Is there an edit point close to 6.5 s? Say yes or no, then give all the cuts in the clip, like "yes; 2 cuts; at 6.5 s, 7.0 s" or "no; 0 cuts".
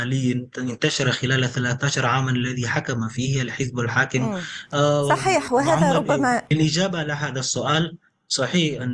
yes; 1 cut; at 6.5 s